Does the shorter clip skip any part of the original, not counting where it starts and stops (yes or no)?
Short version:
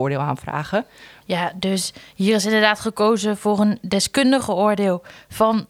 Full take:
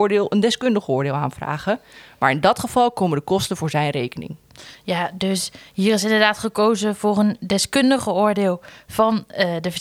yes